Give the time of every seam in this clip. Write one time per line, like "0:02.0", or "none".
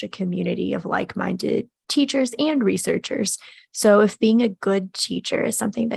0:04.2

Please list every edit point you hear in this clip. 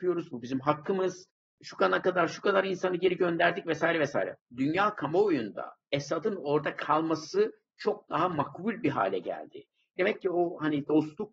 0:04.4
0:09.9

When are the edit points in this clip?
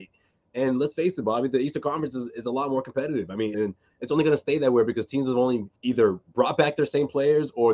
0:03.5
0:05.8

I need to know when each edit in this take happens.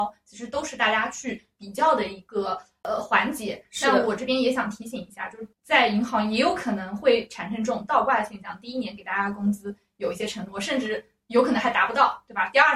0:05.5

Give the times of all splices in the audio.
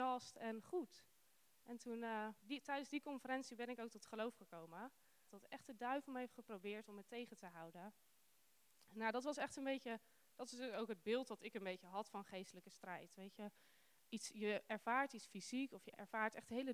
0:02.4
0:05.3

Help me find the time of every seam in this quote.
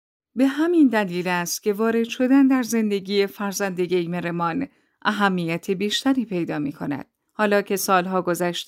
0:07.3

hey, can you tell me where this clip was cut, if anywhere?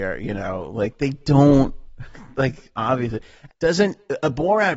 0:03.5

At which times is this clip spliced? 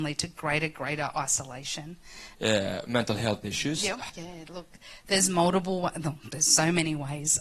0:02.3
0:04.1

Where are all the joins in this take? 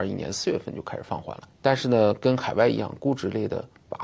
0:01.5

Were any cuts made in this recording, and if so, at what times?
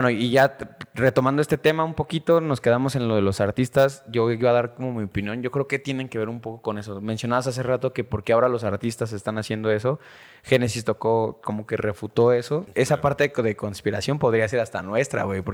0:12.7

